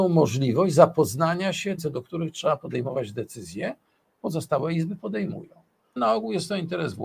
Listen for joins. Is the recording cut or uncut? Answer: cut